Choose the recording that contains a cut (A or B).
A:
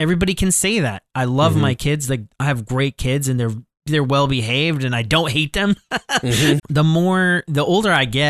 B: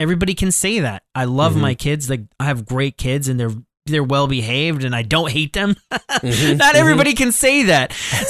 A